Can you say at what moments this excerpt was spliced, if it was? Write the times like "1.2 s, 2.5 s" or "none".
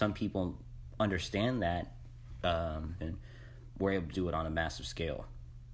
3.0 s, 4.1 s

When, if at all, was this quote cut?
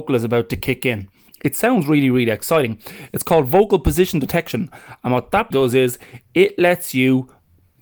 1.3 s, 5.5 s

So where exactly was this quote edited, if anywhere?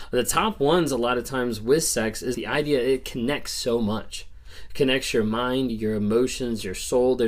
2.3 s, 5.7 s

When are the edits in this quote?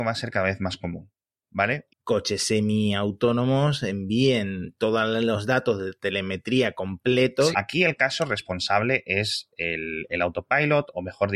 1.9 s, 7.5 s

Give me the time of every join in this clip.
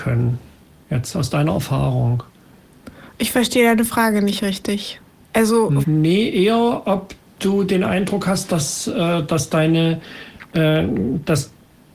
5.8 s

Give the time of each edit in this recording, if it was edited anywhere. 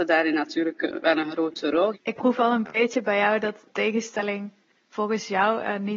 1.9 s, 3.7 s

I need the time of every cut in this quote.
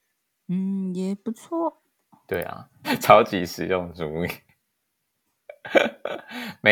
2.8 s

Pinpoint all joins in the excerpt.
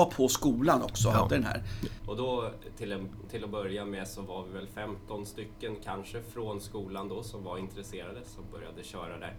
2.0 s

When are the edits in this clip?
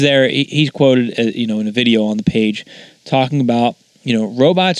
none

